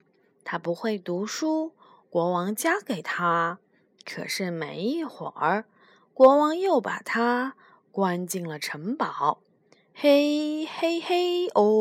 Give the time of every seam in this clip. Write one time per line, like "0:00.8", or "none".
none